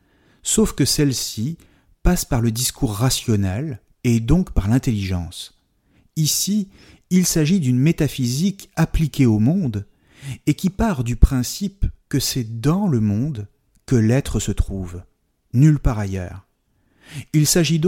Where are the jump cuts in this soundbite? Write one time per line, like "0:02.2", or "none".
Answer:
0:03.9

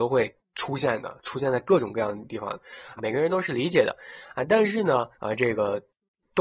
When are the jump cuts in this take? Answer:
0:03.0
0:05.1

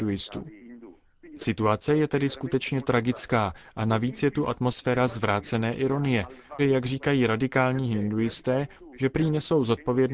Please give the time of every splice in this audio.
0:06.6
0:08.9

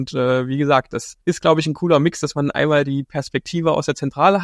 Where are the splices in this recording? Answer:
0:01.2

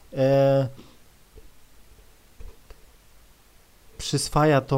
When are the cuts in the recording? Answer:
none

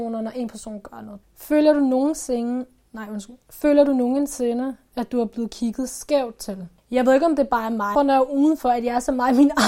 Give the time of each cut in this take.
0:01.2
0:06.8
0:08.0

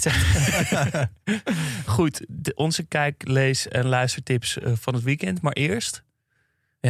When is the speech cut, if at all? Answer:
0:01.9

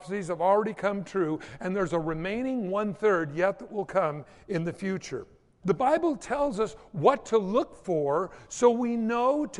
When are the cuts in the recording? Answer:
0:05.6

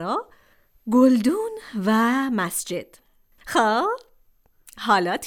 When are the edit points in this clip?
0:03.4

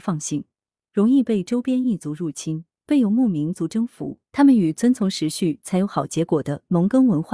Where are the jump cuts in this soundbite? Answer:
0:04.3

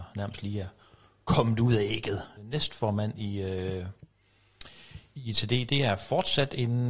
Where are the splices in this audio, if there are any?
0:02.4

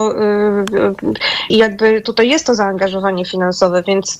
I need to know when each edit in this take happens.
0:01.5

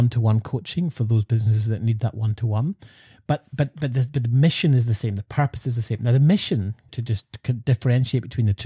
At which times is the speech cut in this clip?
0:06.9

